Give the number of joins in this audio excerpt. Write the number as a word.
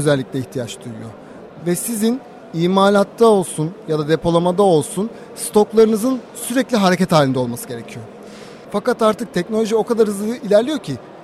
two